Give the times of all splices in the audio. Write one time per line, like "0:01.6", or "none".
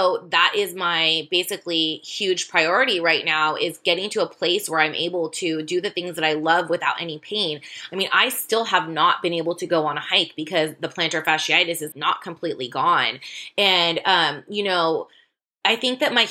0:11.9

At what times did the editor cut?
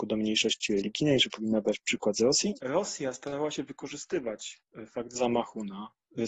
0:02.6

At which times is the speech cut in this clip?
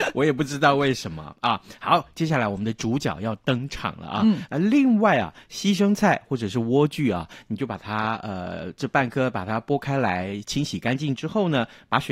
0:04.5

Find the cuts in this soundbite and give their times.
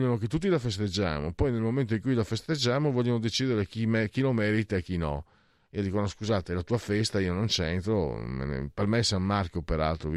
none

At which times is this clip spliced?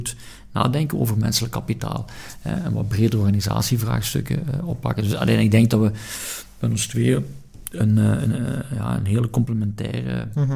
none

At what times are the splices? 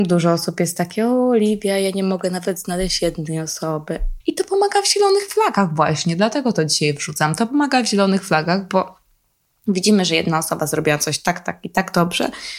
0:04.2

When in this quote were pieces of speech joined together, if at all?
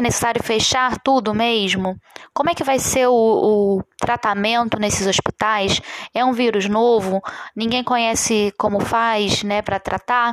none

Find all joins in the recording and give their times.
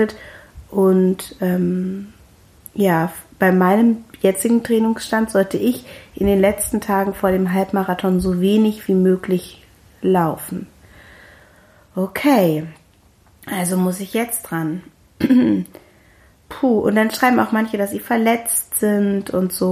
none

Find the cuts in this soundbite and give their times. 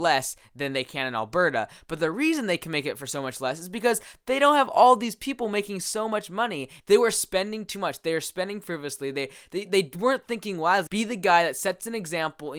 0:06.8
0:10.9

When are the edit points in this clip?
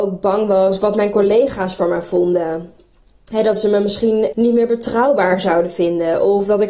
0:04.3

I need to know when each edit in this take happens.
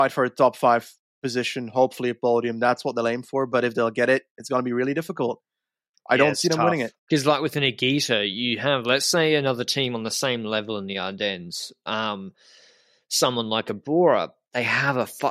0:07.0

